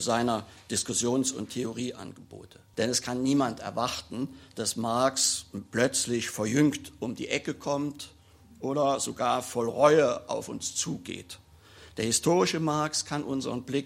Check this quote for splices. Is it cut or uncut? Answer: cut